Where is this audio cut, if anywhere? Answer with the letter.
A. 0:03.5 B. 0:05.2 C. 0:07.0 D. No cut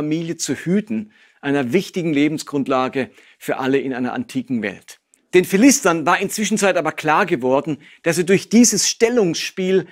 B